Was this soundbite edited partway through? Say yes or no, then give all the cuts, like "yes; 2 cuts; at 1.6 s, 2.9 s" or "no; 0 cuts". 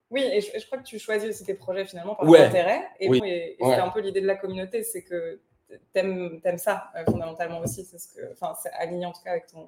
yes; 1 cut; at 3.2 s